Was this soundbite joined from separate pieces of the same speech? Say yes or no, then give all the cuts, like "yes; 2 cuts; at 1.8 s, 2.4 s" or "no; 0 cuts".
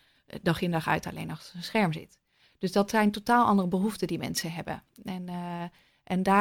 no; 0 cuts